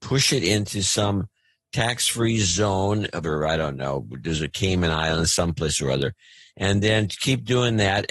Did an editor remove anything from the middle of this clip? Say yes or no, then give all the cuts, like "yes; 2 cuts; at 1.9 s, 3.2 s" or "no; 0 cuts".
yes; 1 cut; at 3.2 s